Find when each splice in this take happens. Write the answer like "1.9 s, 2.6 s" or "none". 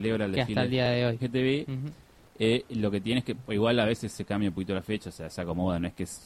1.2 s